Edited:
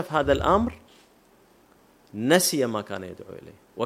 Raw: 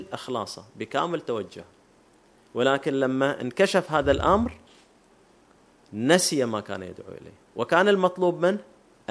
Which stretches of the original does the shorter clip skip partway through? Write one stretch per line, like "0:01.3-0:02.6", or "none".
none